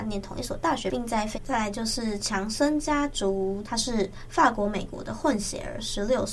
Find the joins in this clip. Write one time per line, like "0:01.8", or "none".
0:01.3
0:03.6